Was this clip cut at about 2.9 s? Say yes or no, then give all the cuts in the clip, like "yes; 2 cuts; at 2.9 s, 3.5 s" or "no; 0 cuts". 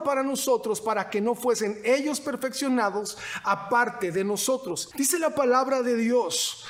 no; 1 cut; at 4.9 s